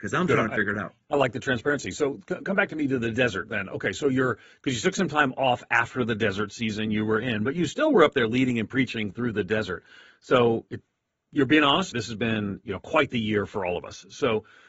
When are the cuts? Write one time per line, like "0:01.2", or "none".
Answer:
0:11.9